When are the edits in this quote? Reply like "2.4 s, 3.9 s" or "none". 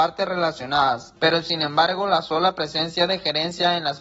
1.2 s